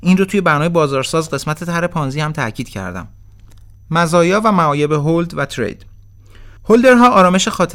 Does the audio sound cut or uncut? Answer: cut